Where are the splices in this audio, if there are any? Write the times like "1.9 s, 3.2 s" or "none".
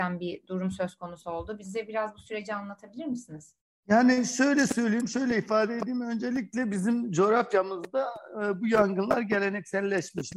none